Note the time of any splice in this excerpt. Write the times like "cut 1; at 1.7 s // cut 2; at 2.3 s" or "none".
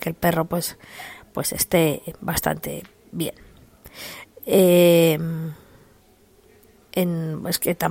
none